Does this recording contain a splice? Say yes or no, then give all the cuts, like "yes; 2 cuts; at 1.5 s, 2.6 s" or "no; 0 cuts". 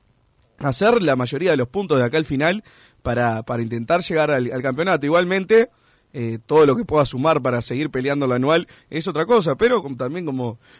no; 0 cuts